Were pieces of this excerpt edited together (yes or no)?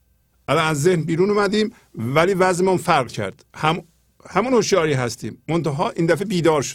yes